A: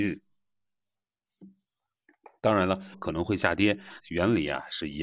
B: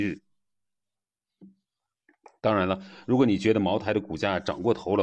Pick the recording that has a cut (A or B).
A